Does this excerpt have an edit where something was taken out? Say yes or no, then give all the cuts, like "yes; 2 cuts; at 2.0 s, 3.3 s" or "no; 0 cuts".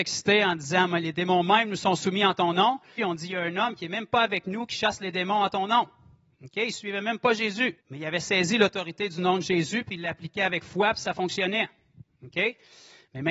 yes; 2 cuts; at 3.0 s, 7.8 s